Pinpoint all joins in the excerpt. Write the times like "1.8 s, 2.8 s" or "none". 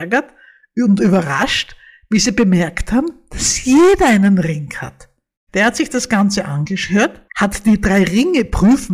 5.4 s, 7.3 s